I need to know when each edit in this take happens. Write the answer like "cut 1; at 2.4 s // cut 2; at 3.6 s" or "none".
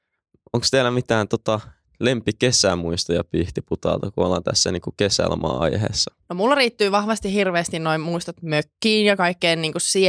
cut 1; at 6.2 s